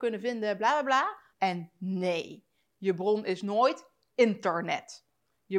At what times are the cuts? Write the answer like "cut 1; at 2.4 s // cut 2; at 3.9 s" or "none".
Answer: cut 1; at 1.3 s

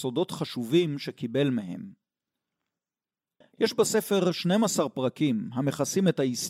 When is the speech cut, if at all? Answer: cut 1; at 3.4 s

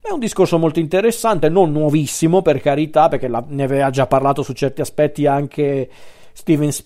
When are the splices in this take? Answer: none

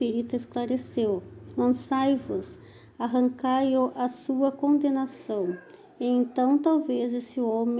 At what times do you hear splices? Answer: none

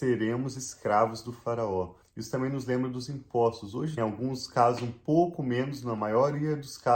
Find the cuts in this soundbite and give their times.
cut 1; at 2.0 s // cut 2; at 4.0 s

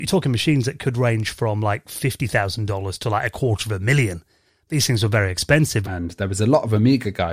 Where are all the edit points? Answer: cut 1; at 5.8 s

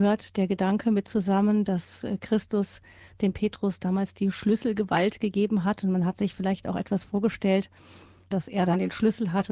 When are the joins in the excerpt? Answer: cut 1; at 8.3 s

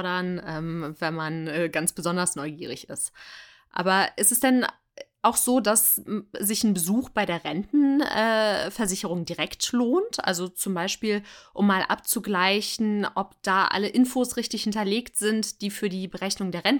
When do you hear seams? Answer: none

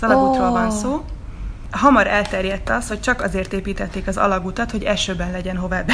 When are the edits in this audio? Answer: none

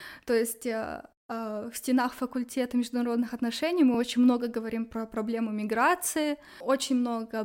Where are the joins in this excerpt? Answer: none

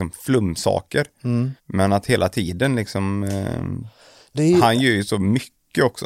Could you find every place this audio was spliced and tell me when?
cut 1; at 1.6 s // cut 2; at 4.3 s

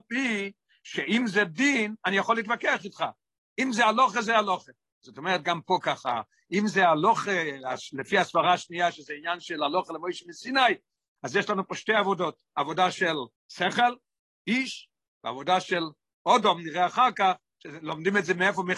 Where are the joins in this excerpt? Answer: cut 1; at 13.4 s

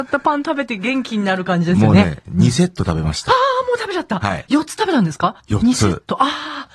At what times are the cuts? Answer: cut 1; at 5.4 s

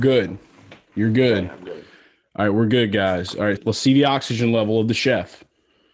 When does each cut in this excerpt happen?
cut 1; at 3.6 s

